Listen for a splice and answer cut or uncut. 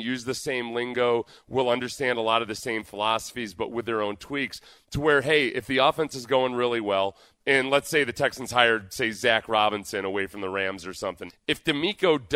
cut